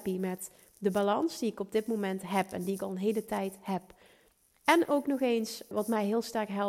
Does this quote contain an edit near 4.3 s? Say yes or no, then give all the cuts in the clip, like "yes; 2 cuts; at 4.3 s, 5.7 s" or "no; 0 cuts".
no; 1 cut; at 5.7 s